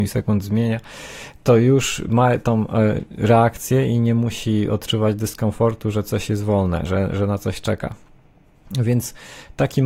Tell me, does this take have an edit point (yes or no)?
no